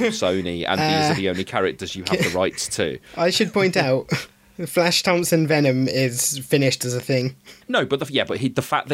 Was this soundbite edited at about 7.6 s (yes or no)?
yes